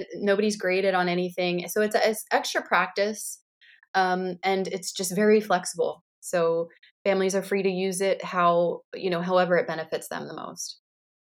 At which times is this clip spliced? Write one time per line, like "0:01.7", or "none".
none